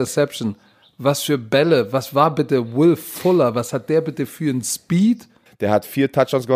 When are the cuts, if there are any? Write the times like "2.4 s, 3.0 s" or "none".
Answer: 5.5 s